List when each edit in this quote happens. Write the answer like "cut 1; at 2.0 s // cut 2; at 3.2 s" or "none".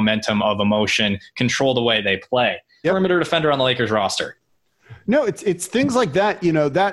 cut 1; at 2.8 s

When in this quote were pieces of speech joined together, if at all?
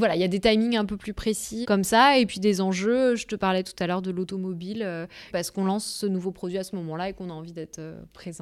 cut 1; at 1.6 s // cut 2; at 5.3 s

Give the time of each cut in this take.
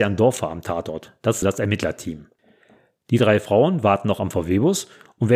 cut 1; at 1.4 s

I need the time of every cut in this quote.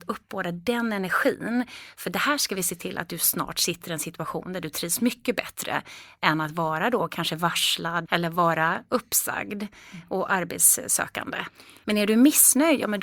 cut 1; at 8.1 s // cut 2; at 11.8 s

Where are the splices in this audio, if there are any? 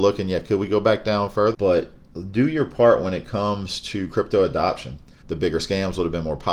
cut 1; at 1.5 s // cut 2; at 5.2 s

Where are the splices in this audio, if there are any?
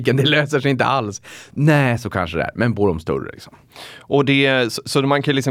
none

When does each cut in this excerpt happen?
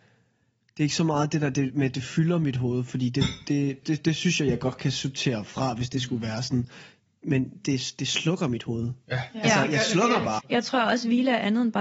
cut 1; at 3.8 s // cut 2; at 10.4 s

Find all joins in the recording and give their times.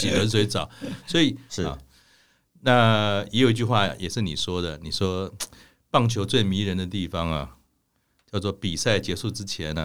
cut 1; at 1.5 s

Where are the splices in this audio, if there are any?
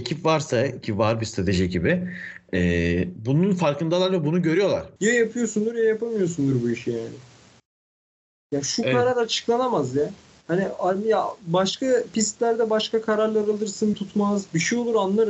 cut 1; at 2.5 s // cut 2; at 5.0 s // cut 3; at 13.9 s

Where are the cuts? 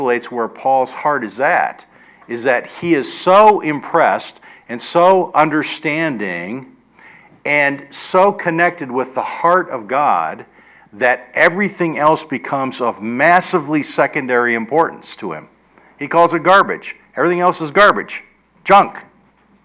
none

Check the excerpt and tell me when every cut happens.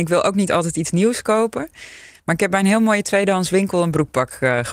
none

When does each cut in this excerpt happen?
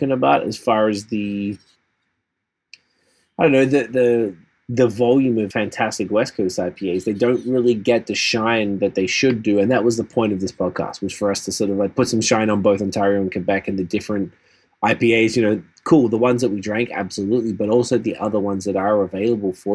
cut 1; at 5.5 s

